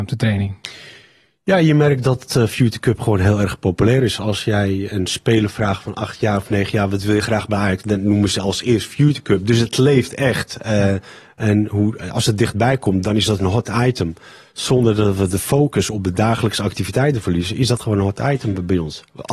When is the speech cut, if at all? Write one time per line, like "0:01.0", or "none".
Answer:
none